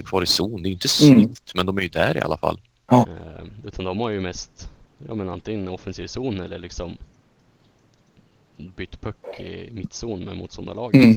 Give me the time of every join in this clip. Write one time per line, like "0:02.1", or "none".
0:03.0